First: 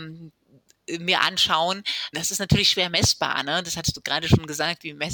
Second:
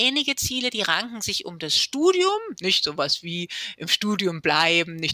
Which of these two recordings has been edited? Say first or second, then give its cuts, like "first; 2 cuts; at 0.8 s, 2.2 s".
first; 1 cut; at 2.1 s